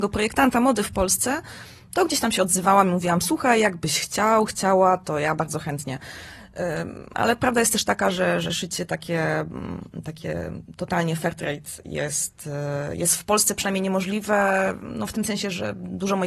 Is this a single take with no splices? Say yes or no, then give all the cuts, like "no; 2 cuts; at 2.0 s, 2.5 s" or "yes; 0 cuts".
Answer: yes; 0 cuts